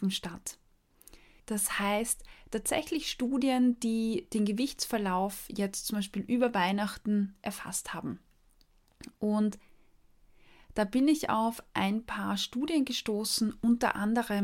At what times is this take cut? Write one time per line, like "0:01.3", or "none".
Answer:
0:01.4